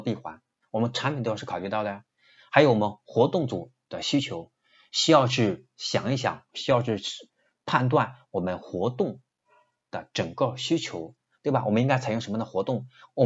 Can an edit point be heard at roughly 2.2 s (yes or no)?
no